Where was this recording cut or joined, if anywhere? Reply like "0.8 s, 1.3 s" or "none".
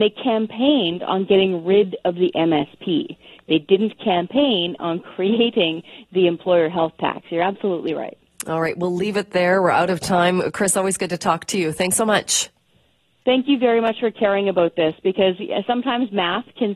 none